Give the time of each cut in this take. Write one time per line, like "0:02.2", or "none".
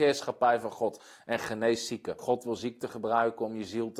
0:02.2